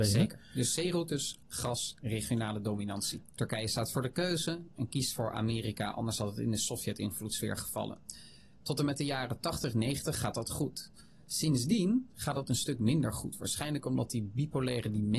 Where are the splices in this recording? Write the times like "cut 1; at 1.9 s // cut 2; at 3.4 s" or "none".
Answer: cut 1; at 1.4 s // cut 2; at 3.2 s